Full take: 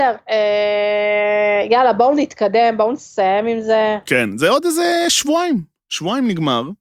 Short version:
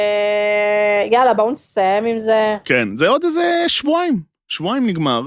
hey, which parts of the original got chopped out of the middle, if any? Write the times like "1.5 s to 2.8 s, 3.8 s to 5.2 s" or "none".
2.0 s to 2.8 s